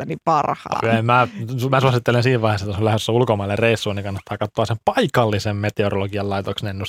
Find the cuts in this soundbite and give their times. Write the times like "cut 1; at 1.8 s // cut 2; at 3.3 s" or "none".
none

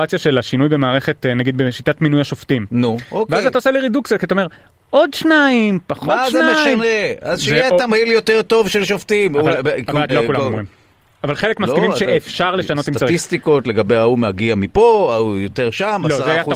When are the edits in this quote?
cut 1; at 10.1 s

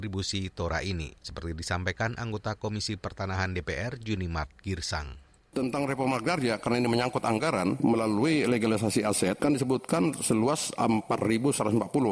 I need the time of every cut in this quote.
cut 1; at 1.2 s

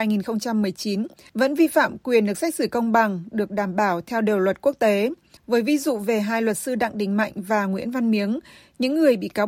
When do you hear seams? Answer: cut 1; at 5.4 s

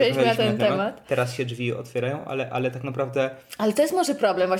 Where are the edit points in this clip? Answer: none

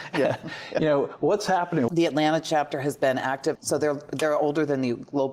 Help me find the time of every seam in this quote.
cut 1; at 1.9 s // cut 2; at 3.6 s

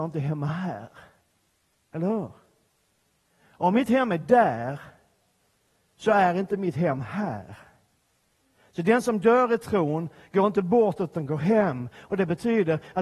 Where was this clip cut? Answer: none

